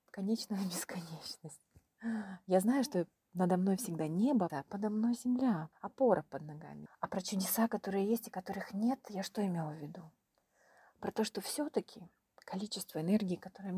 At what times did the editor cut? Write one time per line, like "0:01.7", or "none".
0:04.5
0:05.7
0:06.9